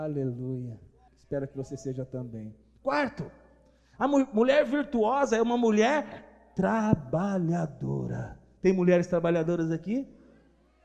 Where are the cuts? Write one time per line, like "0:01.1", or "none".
0:01.1